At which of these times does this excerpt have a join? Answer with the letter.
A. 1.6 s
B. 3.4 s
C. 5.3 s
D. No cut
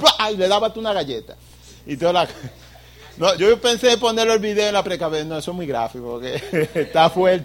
B